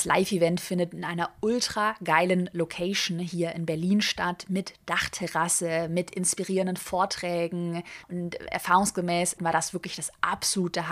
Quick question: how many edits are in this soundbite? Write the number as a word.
two